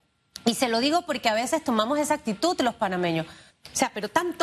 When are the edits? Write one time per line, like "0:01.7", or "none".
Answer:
0:03.5